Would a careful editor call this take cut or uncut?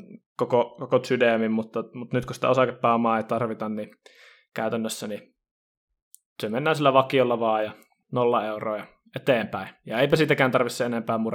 cut